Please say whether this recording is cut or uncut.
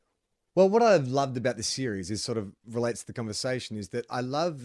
uncut